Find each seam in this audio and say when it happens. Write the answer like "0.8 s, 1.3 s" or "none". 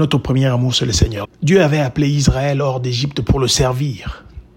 1.2 s